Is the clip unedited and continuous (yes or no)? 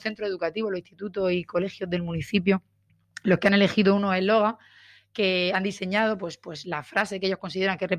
yes